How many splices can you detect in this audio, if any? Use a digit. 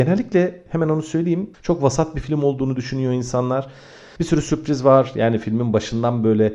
2